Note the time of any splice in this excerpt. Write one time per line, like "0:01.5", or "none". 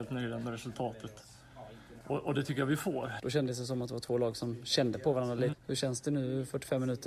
0:02.0
0:03.2
0:05.5